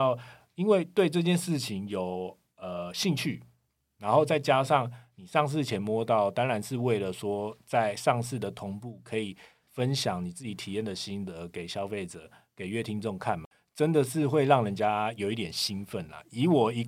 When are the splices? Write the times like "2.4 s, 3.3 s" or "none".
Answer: none